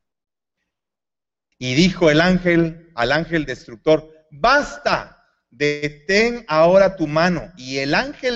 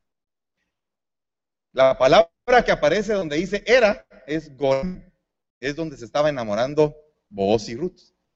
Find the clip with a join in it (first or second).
first